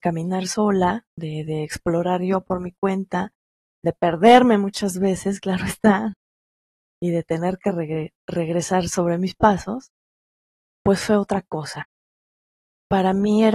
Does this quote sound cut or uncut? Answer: uncut